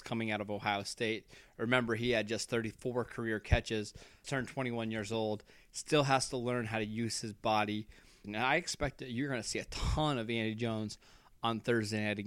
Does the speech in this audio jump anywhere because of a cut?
yes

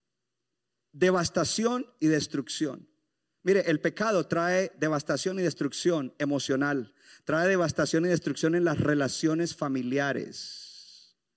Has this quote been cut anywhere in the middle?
no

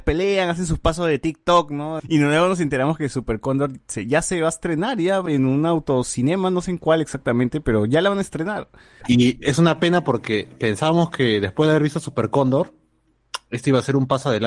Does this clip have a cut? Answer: yes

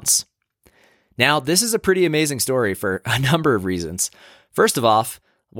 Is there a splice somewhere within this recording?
no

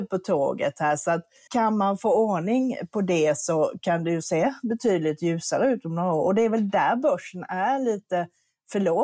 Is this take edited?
yes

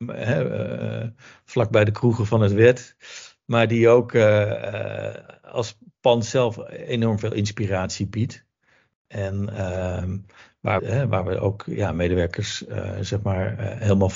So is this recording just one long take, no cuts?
no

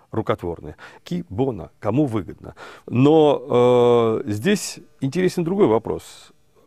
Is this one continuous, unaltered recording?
no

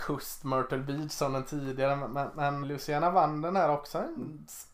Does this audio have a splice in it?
yes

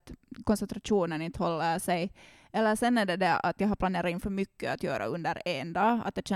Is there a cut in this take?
no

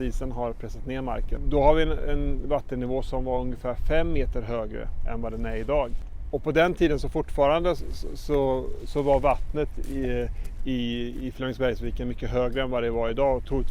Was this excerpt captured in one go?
yes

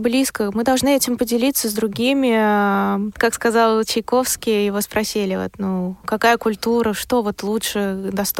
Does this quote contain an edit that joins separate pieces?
no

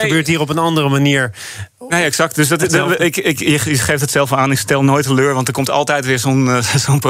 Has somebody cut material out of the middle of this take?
no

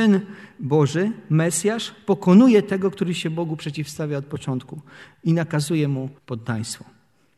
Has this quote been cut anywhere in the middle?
yes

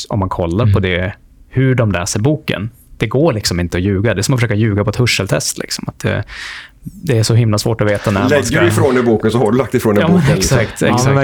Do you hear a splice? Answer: no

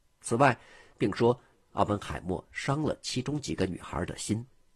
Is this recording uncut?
no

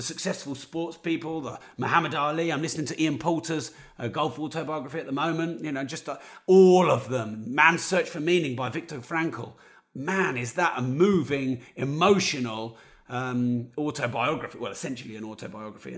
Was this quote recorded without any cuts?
yes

